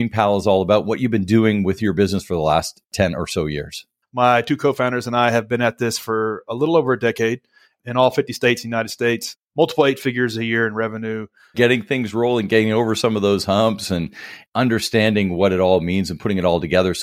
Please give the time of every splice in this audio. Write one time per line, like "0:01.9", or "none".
0:04.0
0:11.5